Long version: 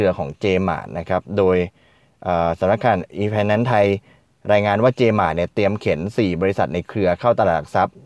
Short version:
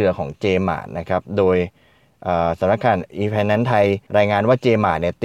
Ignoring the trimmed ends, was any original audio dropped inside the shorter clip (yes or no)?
yes